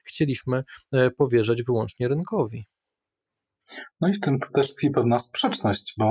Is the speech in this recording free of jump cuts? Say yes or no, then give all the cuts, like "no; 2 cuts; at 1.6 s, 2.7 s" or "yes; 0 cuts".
yes; 0 cuts